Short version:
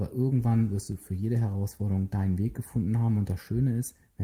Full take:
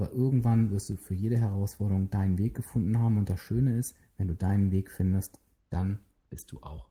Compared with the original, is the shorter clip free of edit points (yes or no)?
yes